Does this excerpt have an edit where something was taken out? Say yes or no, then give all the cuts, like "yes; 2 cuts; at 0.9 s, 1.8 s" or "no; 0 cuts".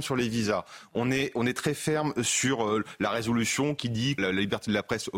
yes; 1 cut; at 4.2 s